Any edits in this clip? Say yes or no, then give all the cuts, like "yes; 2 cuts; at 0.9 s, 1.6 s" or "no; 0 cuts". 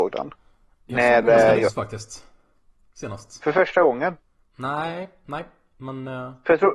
no; 0 cuts